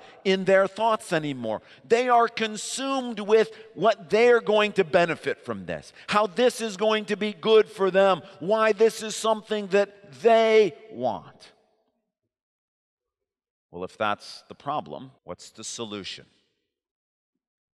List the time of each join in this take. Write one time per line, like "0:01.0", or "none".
0:13.5
0:15.2